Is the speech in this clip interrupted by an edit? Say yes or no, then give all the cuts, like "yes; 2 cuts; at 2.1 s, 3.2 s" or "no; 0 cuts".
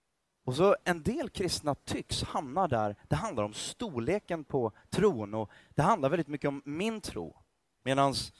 no; 0 cuts